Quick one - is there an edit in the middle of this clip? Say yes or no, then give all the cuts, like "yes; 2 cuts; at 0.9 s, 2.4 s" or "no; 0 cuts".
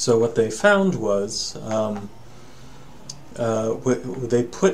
no; 0 cuts